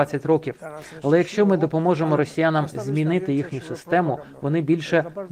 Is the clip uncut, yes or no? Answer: yes